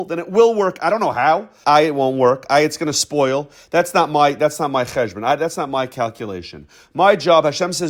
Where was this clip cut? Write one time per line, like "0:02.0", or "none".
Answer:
0:01.6